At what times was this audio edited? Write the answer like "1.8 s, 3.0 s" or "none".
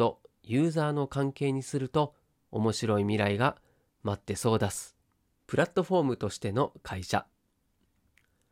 5.3 s

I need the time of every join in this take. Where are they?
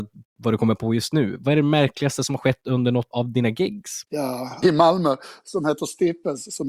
3.1 s, 4.6 s

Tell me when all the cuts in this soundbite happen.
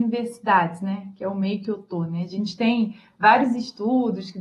none

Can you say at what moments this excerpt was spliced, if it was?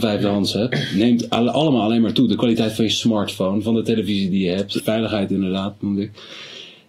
4.8 s

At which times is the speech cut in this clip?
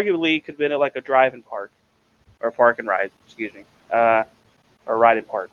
none

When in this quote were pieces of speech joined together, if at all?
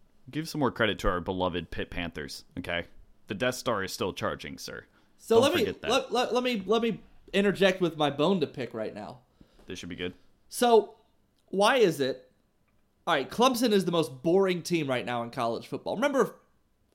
none

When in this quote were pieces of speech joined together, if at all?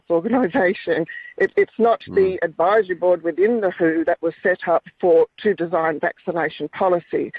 none

